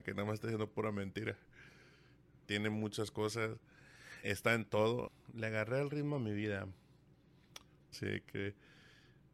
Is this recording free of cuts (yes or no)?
no